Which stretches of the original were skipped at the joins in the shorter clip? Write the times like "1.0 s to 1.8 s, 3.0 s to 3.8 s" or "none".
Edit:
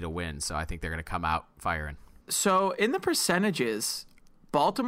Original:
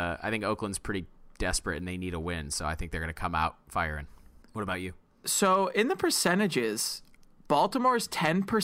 4.3 s to 5.2 s